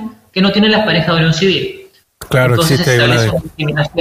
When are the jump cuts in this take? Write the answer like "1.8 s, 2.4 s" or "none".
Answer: 2.0 s